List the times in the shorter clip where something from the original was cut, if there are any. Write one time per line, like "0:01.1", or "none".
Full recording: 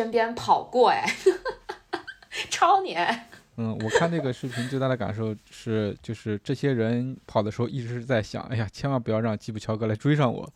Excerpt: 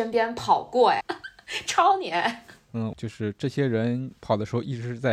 0:01.0
0:02.9